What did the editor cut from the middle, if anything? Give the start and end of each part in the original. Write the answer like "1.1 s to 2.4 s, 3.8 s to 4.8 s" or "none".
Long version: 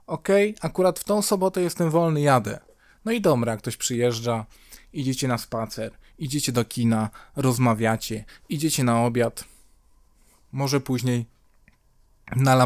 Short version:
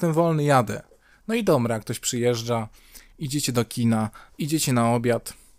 4.9 s to 6.1 s, 7.3 s to 8.4 s

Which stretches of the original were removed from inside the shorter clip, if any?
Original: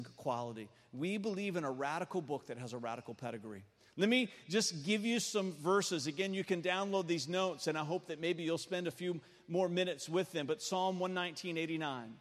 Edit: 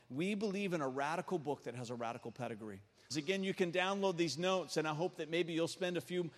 3.9 s to 6.0 s

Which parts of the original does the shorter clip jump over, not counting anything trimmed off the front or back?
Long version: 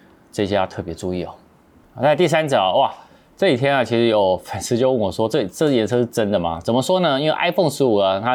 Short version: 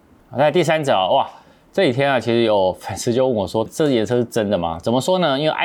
5.3 s to 5.5 s

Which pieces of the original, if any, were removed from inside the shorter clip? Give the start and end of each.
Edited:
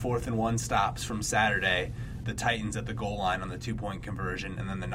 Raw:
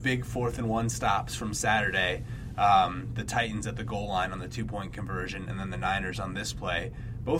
2.5 s to 3.1 s

